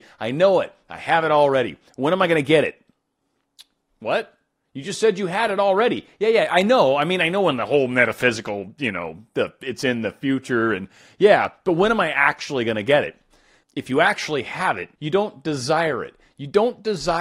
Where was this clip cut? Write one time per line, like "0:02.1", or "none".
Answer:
0:13.6
0:15.0